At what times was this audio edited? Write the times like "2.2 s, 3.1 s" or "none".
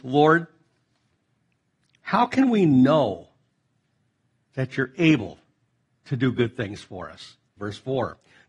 7.6 s